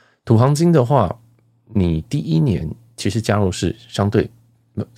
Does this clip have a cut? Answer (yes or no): no